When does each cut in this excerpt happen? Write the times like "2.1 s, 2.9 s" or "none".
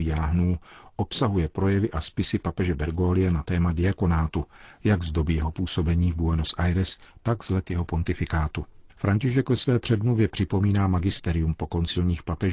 8.9 s